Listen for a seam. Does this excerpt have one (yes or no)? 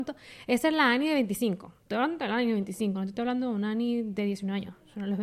no